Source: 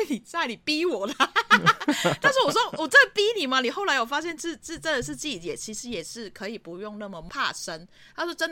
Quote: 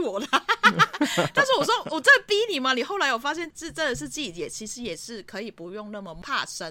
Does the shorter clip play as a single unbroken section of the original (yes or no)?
no